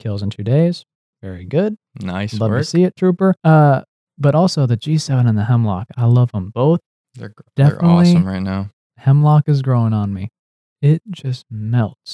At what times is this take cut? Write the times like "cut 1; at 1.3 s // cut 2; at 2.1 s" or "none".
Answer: cut 1; at 3.4 s